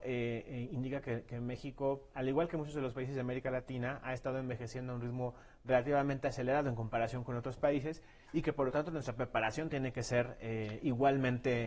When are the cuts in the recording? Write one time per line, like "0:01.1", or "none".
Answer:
none